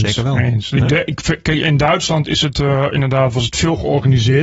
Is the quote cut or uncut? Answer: uncut